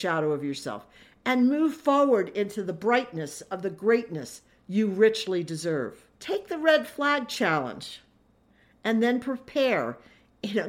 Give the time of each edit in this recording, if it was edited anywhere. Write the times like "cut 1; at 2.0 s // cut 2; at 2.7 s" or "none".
cut 1; at 6.1 s